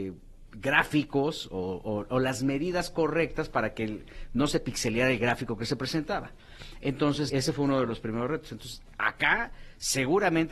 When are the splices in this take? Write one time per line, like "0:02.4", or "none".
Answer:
0:07.3